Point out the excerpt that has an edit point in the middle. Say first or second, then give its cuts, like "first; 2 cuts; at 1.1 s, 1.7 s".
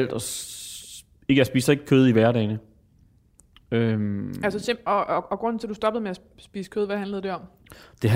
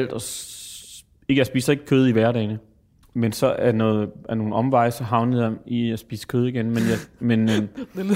second; 1 cut; at 3.0 s